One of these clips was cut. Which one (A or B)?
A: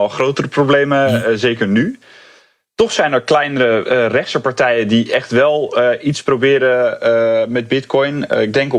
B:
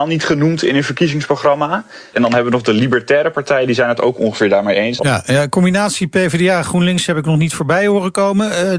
B